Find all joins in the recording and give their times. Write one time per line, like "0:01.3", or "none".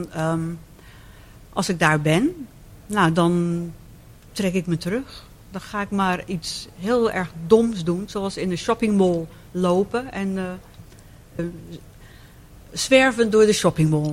0:11.4

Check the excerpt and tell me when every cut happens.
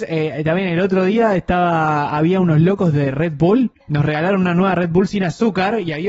0:03.8

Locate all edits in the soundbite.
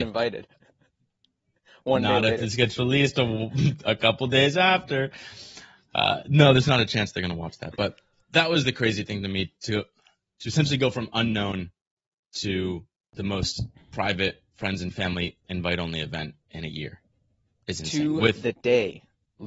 none

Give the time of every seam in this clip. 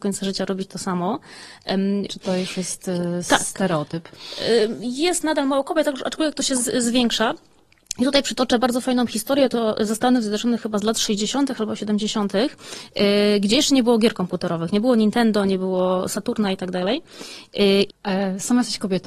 0:02.1
0:17.9

